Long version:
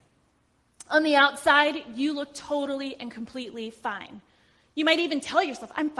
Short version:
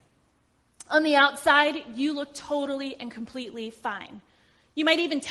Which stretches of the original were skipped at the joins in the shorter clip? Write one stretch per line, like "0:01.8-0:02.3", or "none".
none